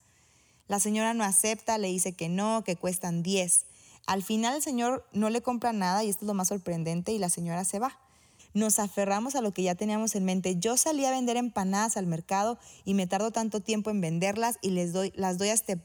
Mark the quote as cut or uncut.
cut